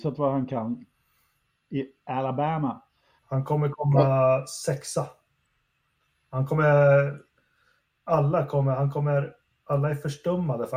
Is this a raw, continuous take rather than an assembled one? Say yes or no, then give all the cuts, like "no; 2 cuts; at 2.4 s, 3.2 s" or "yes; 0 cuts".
no; 1 cut; at 3.2 s